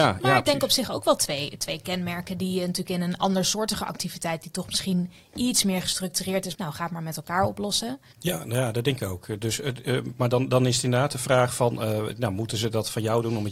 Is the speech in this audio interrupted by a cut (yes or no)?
yes